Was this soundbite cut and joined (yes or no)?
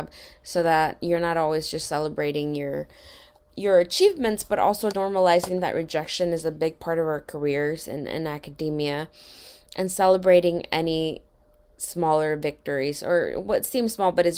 yes